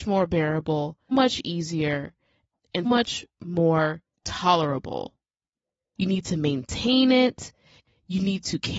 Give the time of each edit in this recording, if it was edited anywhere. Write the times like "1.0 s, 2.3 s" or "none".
1.1 s, 2.8 s, 5.9 s